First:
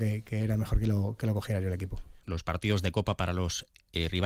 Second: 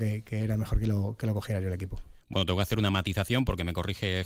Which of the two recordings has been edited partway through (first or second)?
first